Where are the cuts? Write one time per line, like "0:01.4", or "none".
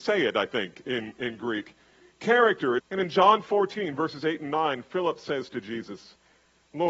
0:02.8